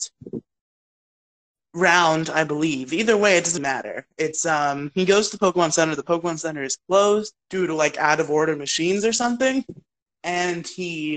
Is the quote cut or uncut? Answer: cut